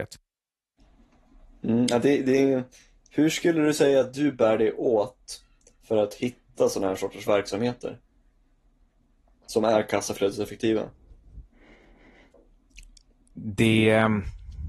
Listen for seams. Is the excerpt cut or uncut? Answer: uncut